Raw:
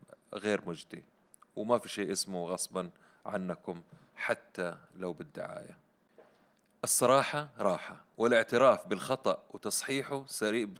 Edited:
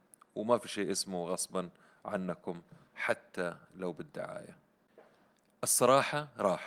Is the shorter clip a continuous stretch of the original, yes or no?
yes